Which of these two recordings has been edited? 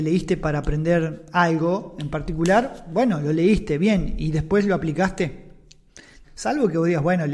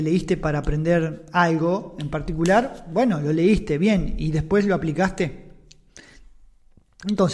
first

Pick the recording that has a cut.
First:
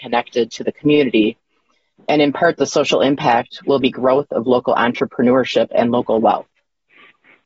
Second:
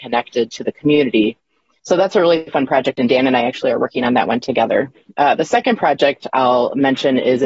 second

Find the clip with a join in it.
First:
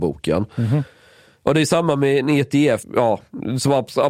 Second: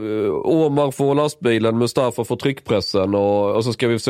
first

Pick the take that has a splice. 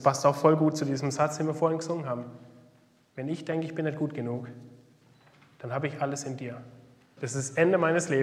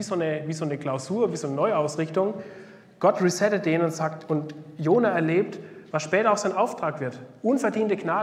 first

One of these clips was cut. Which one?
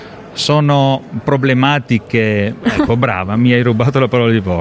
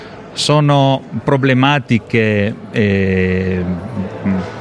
first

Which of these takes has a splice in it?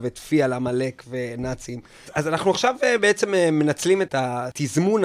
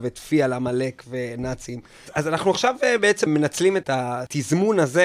second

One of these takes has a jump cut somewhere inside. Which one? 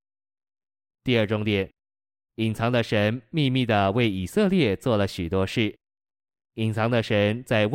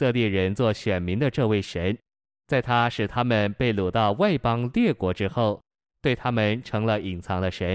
first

